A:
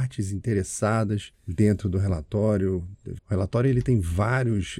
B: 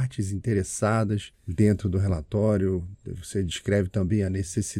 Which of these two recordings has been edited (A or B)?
A